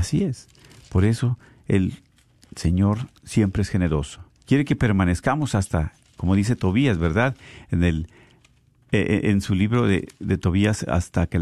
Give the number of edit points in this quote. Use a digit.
1